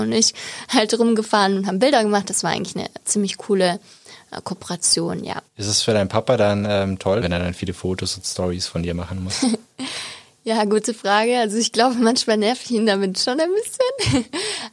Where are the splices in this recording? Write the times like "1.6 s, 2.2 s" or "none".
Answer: 5.5 s, 7.2 s